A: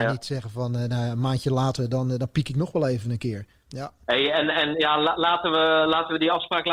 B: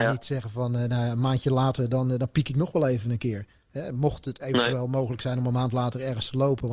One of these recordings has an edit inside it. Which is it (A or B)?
A